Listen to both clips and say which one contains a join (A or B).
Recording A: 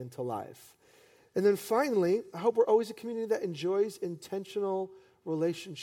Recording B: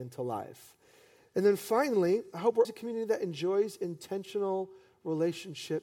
B